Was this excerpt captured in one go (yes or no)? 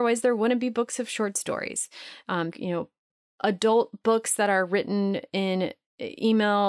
no